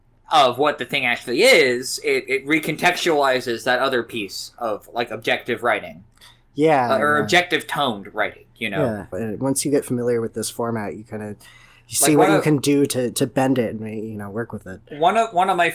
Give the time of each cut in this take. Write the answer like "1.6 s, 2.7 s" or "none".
9.1 s